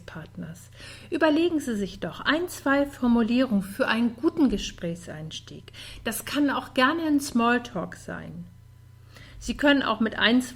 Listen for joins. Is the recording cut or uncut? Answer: uncut